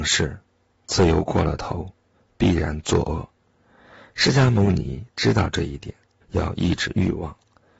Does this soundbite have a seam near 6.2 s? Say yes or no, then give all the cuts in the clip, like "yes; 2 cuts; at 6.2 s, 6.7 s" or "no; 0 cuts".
yes; 1 cut; at 6.2 s